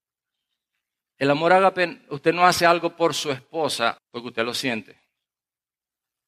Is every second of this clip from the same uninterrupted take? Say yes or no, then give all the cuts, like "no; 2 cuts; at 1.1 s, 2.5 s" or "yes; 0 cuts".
no; 1 cut; at 4.0 s